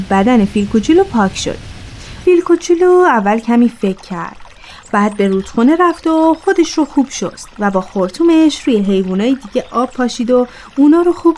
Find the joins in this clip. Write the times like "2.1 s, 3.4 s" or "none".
2.2 s